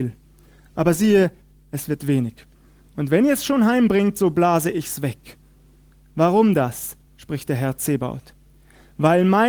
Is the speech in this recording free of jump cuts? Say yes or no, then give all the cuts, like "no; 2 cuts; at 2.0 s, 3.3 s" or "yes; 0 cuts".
yes; 0 cuts